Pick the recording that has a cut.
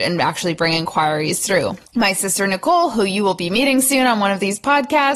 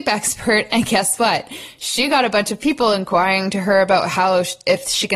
first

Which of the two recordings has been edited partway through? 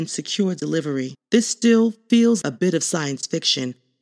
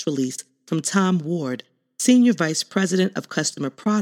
first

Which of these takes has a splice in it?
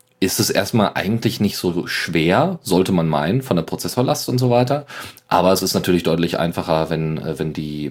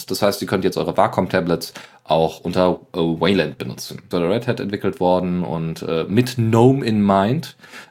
second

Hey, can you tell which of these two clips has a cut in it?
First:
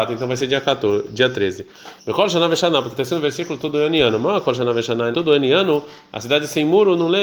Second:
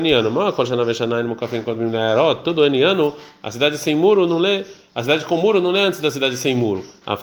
first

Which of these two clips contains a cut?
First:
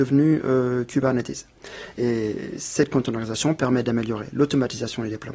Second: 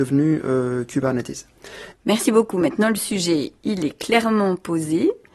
second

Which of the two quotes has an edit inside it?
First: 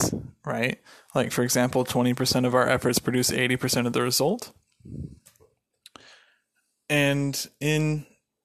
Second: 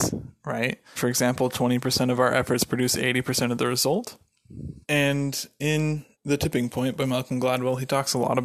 second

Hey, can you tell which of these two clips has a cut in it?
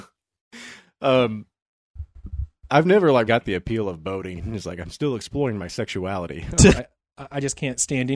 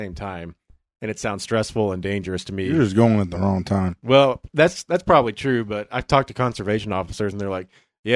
first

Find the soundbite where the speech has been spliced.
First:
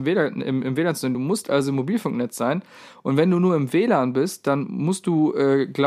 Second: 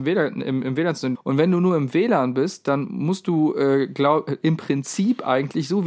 second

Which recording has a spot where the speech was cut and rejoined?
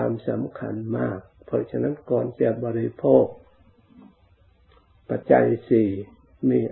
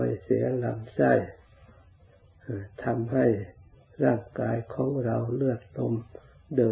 first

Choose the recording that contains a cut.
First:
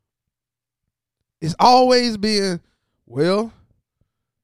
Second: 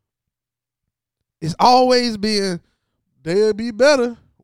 second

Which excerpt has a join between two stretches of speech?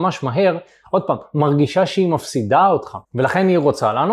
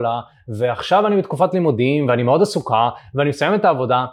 first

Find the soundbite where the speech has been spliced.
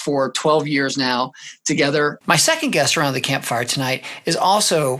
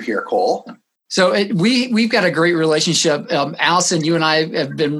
first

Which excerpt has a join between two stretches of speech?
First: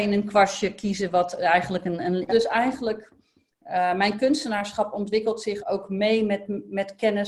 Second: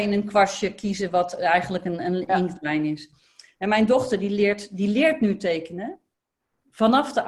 first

